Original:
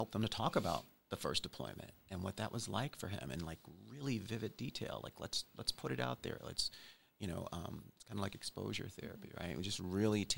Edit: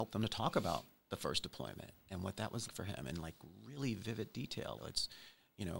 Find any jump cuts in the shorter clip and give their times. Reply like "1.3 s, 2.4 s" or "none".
2.7 s, 4.8 s